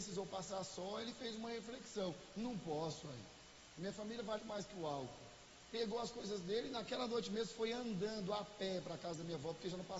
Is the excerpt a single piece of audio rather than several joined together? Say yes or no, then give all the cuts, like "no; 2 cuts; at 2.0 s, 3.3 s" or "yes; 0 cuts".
no; 1 cut; at 4.4 s